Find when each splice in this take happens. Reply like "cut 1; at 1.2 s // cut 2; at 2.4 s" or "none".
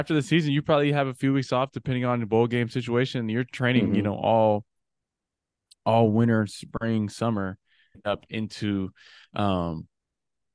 cut 1; at 7.9 s